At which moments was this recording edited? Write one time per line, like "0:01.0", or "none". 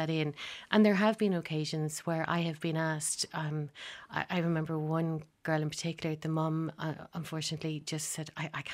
none

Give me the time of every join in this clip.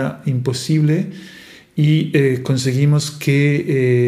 none

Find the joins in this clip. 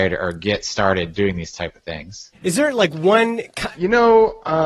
0:02.3
0:03.7

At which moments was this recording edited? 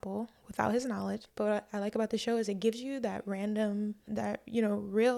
0:01.2
0:04.1

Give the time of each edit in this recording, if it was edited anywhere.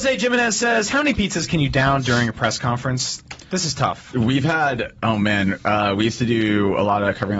none

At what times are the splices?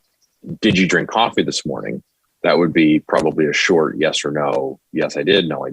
none

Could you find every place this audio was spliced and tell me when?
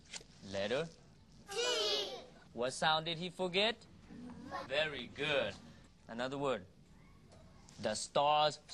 0:02.5
0:04.7
0:05.9

